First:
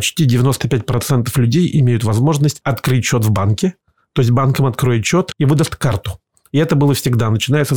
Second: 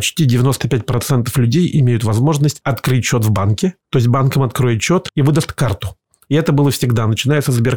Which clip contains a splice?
second; 1 cut; at 3.8 s

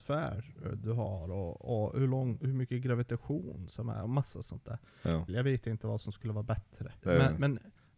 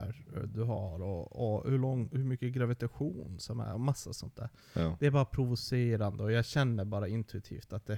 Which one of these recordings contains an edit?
first; 2 cuts; at 5.3 s, 7.0 s

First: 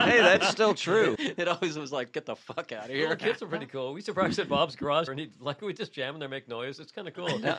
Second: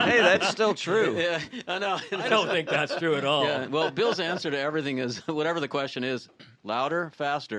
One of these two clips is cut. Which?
first; 2 cuts; at 1.1 s, 5.1 s

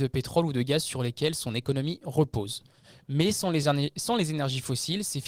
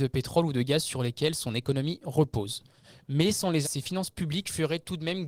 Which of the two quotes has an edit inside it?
second; 1 cut; at 3.6 s

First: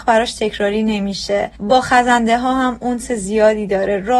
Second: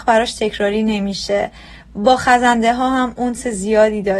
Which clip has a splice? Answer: first; 1 cut; at 1.5 s

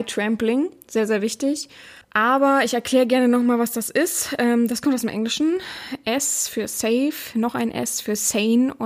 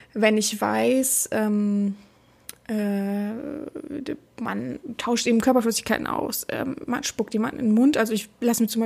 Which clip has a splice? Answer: first; 1 cut; at 2.0 s

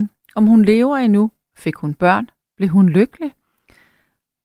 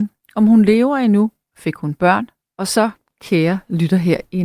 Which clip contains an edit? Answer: second; 1 cut; at 2.5 s

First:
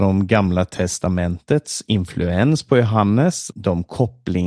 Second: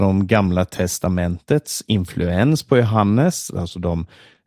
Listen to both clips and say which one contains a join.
first; 1 cut; at 3.5 s

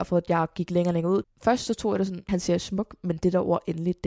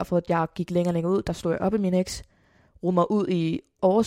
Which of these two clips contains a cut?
first; 2 cuts; at 1.2 s, 2.3 s

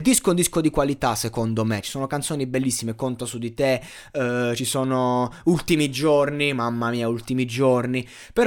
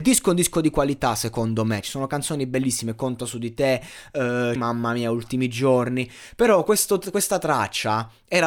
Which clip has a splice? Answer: second; 1 cut; at 4.6 s

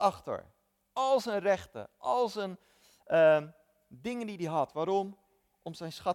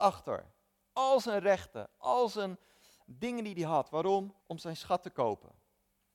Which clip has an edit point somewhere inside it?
second; 2 cuts; at 3.0 s, 4.4 s

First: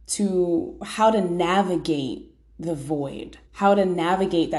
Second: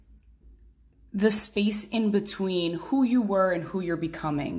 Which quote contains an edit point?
first; 1 cut; at 3.4 s

